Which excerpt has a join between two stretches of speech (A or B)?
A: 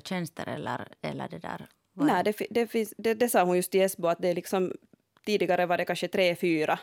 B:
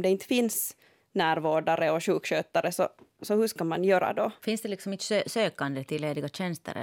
B